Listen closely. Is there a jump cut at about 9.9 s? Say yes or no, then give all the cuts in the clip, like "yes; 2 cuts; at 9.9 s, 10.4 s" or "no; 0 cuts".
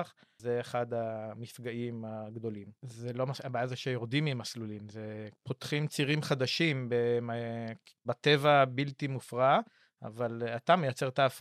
no; 2 cuts; at 2.8 s, 8.1 s